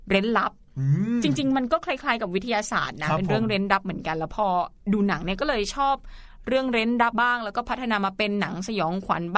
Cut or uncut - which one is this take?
cut